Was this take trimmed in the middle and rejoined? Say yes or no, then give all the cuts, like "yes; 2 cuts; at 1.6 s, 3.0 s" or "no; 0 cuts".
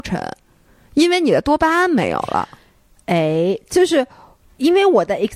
no; 0 cuts